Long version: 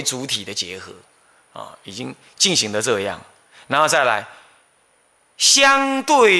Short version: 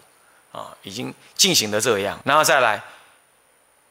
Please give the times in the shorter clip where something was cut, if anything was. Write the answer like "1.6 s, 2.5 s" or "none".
2.2 s